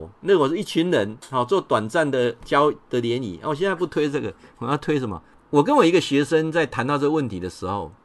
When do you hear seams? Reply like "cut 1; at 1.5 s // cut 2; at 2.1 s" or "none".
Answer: cut 1; at 5.4 s